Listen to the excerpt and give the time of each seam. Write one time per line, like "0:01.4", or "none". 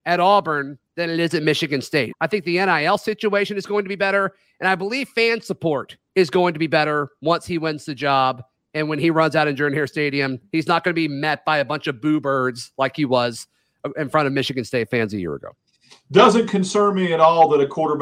0:02.1